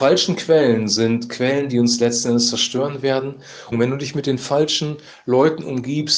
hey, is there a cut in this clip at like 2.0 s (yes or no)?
no